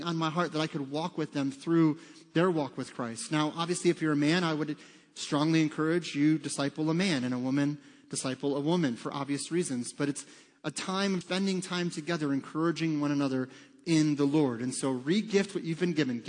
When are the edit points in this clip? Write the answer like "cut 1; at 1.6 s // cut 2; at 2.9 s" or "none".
cut 1; at 11.2 s